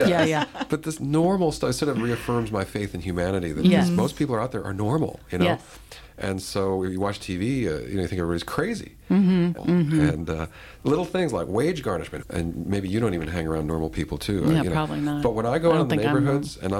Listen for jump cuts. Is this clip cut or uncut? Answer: cut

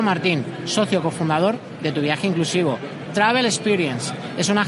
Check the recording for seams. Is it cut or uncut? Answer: cut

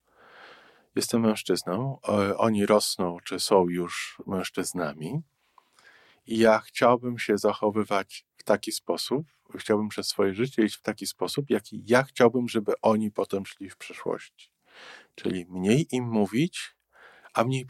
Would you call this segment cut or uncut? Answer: uncut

